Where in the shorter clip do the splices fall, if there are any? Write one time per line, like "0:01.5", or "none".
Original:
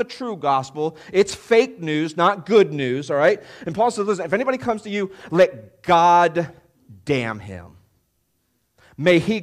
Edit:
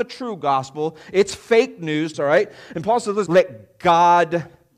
0:02.1
0:03.3